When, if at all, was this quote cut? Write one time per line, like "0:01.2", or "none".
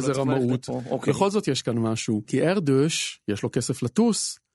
0:02.2